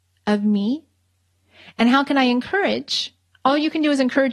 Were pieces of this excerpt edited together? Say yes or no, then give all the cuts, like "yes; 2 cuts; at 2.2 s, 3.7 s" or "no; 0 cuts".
no; 0 cuts